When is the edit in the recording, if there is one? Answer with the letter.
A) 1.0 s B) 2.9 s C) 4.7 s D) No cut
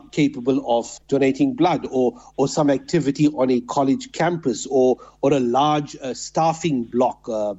A